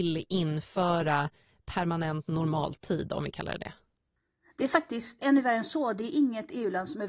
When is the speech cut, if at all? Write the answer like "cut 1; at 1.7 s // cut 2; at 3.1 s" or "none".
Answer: cut 1; at 5.2 s